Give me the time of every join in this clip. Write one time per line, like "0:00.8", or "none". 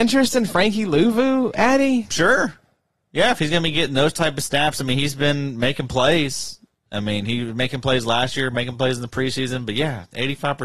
none